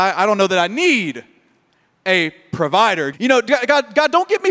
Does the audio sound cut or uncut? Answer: cut